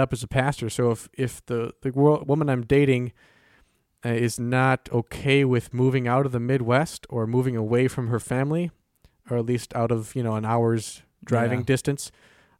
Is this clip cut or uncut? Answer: uncut